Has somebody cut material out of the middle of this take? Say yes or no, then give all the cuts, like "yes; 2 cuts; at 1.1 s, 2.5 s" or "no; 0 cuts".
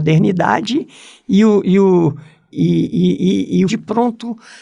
yes; 2 cuts; at 2.5 s, 3.7 s